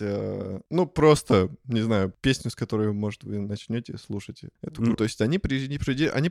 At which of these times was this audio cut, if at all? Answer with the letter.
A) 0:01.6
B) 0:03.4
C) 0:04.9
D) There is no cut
C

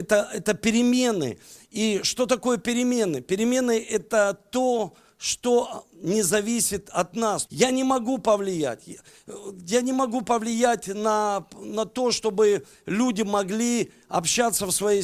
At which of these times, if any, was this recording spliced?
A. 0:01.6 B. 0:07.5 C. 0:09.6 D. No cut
B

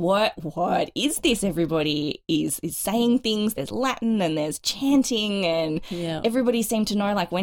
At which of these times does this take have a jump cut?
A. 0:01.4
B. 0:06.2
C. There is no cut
C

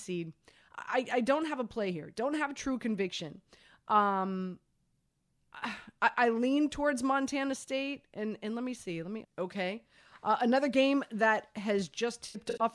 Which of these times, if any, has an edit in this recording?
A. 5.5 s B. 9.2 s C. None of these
B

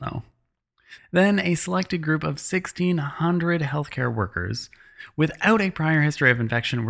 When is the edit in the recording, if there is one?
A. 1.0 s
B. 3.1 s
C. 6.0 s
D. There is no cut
A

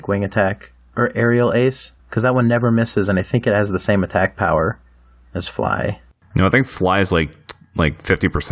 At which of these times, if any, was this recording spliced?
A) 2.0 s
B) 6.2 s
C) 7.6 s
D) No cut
A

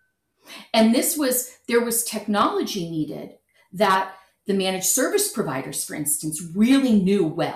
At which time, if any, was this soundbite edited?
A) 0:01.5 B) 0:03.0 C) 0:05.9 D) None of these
D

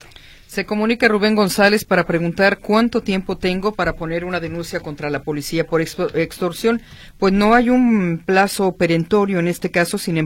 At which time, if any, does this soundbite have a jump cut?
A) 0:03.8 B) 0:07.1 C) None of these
C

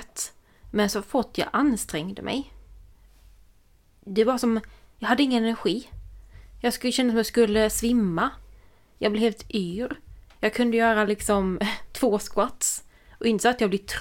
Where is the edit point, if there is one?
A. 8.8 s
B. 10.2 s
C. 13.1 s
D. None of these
D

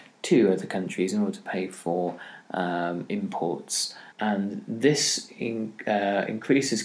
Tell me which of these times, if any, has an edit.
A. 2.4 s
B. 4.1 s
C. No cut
B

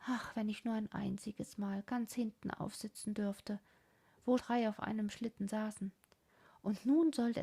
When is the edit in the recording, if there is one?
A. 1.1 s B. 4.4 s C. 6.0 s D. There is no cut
B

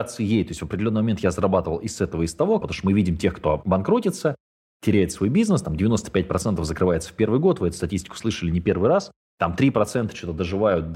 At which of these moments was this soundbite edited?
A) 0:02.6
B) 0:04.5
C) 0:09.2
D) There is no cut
A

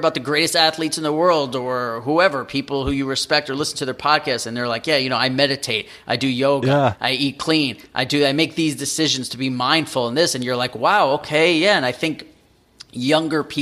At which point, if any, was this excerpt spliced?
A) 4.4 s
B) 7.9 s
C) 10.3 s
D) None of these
D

